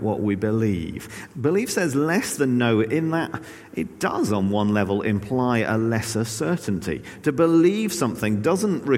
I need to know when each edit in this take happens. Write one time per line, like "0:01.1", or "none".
0:01.3